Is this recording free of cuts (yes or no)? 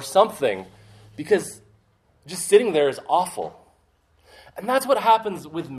yes